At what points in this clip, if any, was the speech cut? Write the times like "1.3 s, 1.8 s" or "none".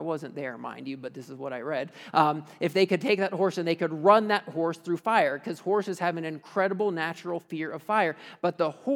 none